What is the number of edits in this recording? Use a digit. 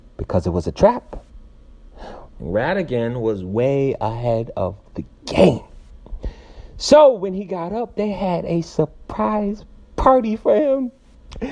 1